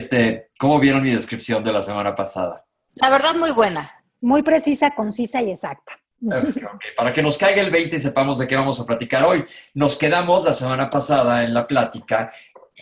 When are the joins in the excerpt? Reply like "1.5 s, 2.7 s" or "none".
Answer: none